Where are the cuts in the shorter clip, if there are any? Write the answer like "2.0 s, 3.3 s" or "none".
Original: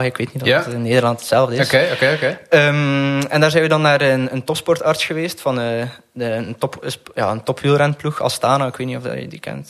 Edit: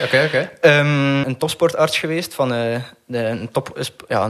1.2 s